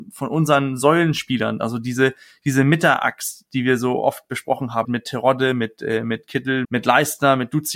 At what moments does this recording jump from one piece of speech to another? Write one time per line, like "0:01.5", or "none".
0:04.8
0:06.6